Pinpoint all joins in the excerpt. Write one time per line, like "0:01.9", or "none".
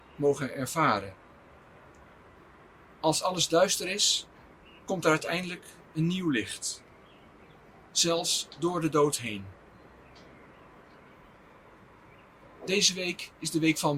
none